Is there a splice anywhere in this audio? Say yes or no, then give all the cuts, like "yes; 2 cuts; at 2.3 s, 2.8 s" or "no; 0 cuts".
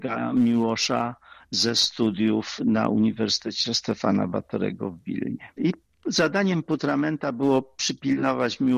no; 0 cuts